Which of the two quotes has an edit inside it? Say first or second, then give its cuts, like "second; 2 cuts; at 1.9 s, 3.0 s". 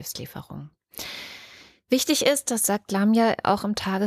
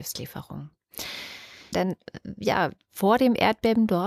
second; 1 cut; at 1.7 s